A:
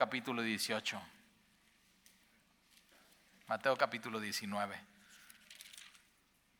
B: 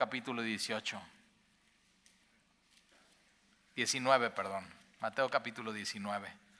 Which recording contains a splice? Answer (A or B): A